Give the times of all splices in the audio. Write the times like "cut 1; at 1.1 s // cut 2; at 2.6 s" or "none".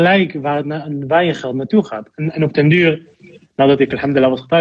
none